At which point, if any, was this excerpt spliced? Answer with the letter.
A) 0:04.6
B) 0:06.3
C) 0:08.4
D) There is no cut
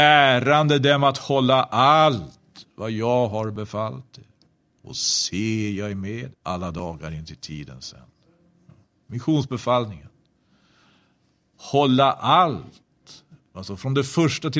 B